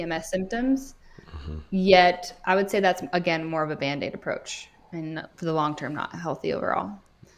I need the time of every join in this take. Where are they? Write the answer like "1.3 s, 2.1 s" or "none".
none